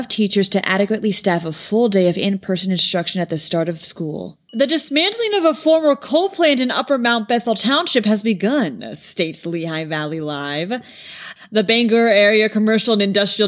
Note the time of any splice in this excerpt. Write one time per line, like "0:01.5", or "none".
0:04.5
0:11.4